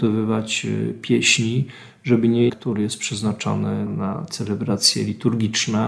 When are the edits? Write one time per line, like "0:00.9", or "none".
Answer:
0:02.5
0:03.9